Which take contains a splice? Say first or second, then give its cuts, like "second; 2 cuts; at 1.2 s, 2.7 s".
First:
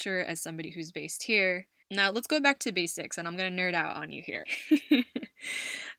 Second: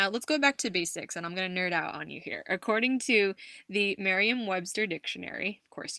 first; 2 cuts; at 1.8 s, 4.4 s